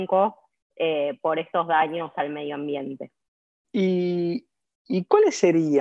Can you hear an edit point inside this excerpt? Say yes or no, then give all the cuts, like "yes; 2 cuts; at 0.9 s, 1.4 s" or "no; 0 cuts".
yes; 1 cut; at 3.6 s